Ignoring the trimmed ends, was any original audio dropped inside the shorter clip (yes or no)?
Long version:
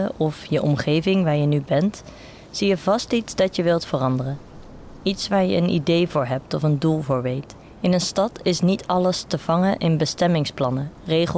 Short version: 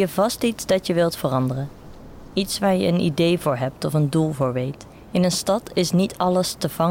no